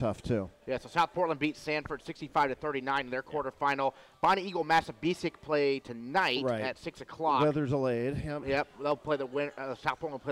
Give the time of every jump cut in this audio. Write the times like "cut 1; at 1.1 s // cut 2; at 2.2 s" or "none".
none